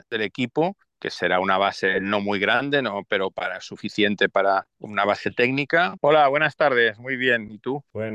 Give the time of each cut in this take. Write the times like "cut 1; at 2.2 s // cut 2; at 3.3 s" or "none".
cut 1; at 6.0 s